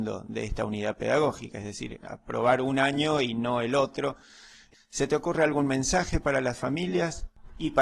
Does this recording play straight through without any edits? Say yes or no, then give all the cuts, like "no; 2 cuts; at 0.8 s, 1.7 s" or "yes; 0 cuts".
yes; 0 cuts